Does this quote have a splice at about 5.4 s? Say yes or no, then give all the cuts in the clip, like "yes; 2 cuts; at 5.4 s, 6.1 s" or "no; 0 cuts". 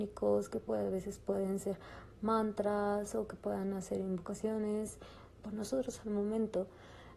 yes; 1 cut; at 5.4 s